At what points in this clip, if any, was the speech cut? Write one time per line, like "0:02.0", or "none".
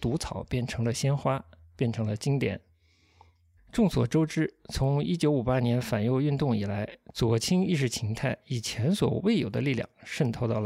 0:03.6